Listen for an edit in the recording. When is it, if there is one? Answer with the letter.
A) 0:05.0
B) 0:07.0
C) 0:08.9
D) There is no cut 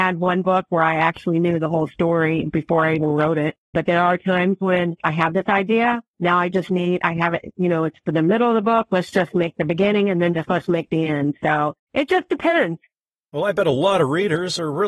A